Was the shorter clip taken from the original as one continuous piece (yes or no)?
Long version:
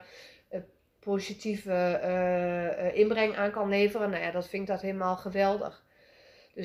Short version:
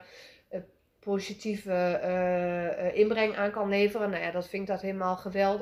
yes